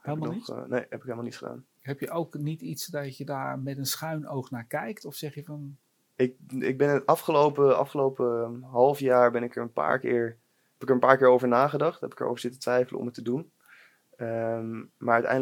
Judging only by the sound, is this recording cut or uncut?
uncut